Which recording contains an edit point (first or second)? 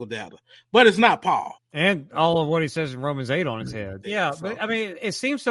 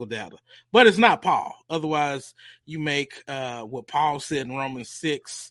first